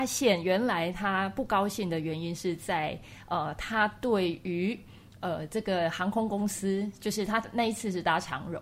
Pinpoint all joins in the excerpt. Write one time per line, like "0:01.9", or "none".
none